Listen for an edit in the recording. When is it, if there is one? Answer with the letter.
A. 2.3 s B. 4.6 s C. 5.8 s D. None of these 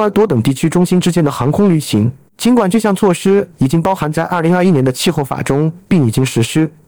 A